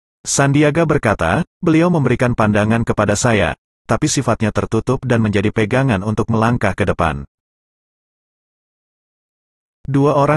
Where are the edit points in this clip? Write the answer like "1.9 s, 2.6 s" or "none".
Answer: 1.5 s

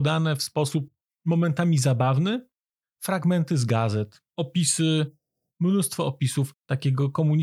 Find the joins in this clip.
2.8 s, 4.3 s

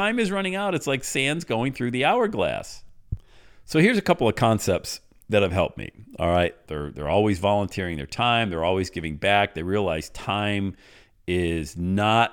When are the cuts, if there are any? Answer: 6.6 s

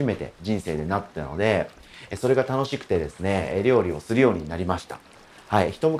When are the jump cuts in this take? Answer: none

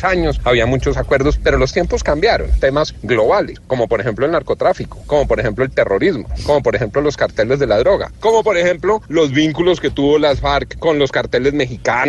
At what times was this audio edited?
2.6 s

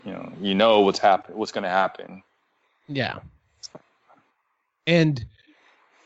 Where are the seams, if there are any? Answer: none

